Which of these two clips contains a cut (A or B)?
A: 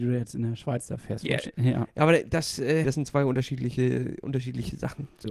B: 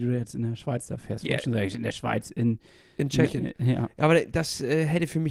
A